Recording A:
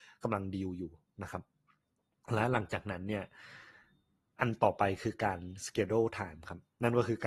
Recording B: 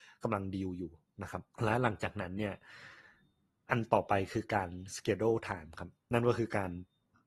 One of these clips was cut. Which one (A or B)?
B